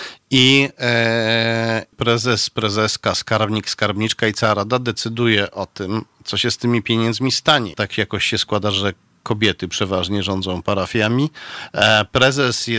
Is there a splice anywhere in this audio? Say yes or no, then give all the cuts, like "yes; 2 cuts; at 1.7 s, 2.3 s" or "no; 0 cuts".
yes; 2 cuts; at 1.9 s, 7.7 s